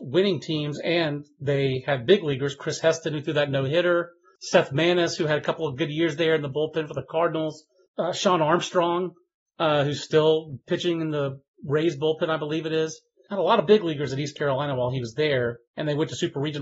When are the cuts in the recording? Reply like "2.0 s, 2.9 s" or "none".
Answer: none